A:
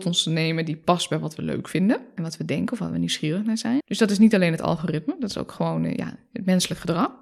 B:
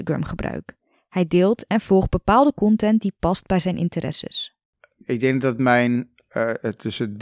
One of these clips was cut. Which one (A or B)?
A